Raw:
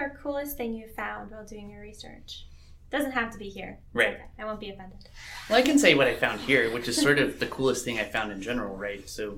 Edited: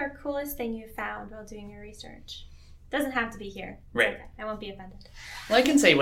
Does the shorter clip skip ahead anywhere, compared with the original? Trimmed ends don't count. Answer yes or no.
no